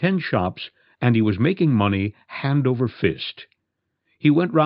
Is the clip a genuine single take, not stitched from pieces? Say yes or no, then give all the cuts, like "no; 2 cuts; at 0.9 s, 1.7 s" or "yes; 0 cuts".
yes; 0 cuts